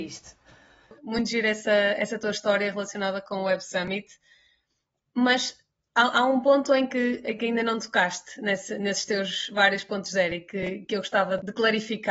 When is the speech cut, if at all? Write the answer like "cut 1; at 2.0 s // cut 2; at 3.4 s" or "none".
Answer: none

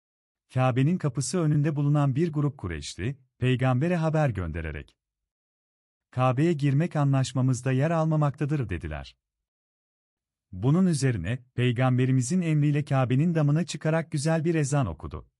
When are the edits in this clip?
cut 1; at 11.5 s

